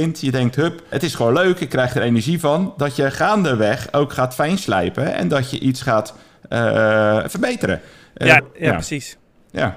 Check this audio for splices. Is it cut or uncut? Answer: cut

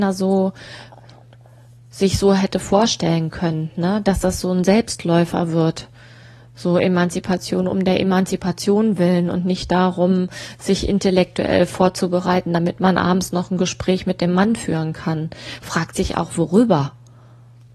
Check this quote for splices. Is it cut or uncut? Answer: uncut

